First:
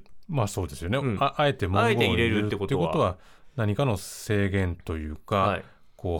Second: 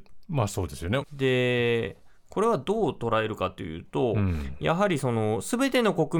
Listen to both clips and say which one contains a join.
second; 1 cut; at 1.0 s

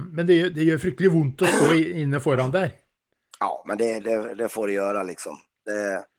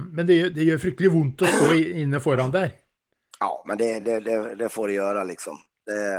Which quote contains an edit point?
first; 1 cut; at 4.0 s

